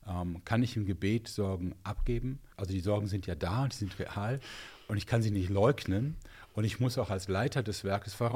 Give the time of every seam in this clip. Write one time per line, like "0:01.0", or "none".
0:02.5